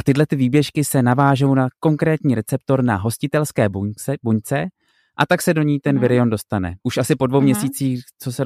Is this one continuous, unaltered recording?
no; 1 cut; at 6.8 s

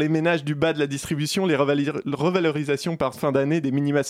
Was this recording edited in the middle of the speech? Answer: yes; 1 cut; at 3.1 s

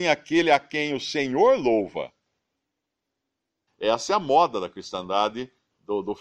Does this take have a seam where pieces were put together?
yes; 1 cut; at 3.7 s

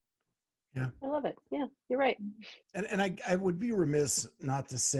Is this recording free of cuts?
no; 1 cut; at 2.6 s

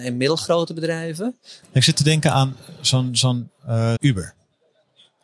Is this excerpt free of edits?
no; 2 cuts; at 1.6 s, 4.0 s

